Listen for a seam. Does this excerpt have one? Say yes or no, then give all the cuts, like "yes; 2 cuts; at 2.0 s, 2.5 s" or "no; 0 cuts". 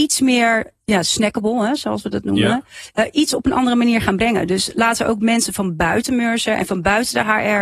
no; 0 cuts